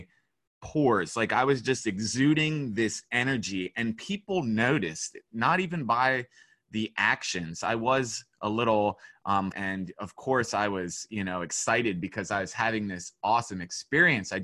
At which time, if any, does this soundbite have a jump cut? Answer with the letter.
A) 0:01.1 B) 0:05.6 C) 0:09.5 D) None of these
C